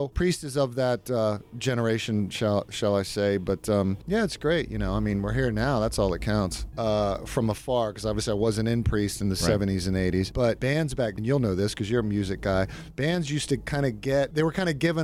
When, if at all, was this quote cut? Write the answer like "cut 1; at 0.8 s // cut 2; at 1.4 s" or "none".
cut 1; at 6.7 s // cut 2; at 11.2 s